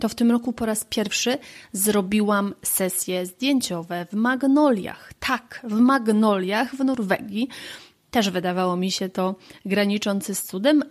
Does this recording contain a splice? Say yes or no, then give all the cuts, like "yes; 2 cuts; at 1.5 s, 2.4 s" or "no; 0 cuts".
no; 0 cuts